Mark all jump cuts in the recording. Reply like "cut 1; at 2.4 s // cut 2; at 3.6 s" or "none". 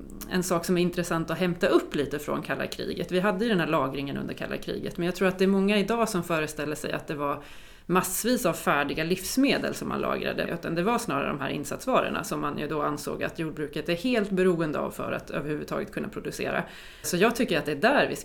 cut 1; at 10.5 s // cut 2; at 17.0 s